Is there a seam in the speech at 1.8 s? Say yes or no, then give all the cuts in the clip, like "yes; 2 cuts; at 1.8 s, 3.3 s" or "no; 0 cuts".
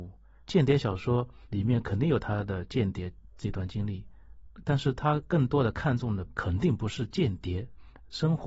no; 0 cuts